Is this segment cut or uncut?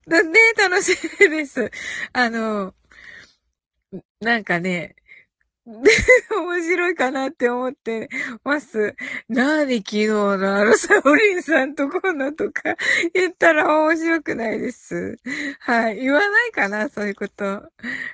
uncut